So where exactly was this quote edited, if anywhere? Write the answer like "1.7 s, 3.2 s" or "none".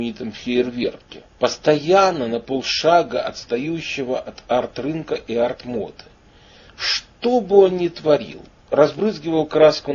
none